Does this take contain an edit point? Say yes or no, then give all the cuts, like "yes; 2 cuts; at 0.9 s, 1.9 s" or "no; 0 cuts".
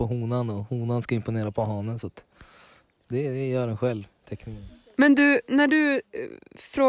no; 0 cuts